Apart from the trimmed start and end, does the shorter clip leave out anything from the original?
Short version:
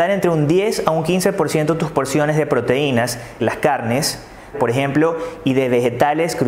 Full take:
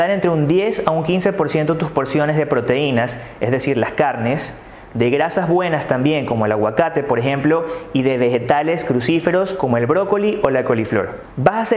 yes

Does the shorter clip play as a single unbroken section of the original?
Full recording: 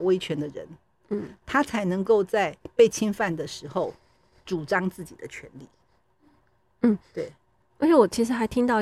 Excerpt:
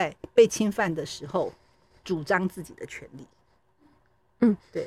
yes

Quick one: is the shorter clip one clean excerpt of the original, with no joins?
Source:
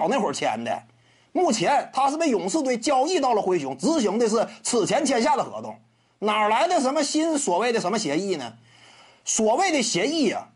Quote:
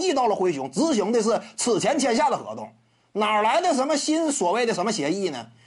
yes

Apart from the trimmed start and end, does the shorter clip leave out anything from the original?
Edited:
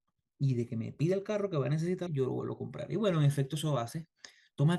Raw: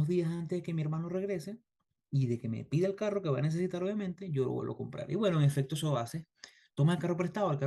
yes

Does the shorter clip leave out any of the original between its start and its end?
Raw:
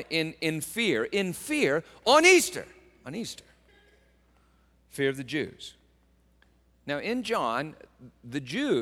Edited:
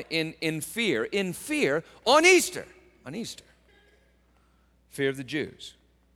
no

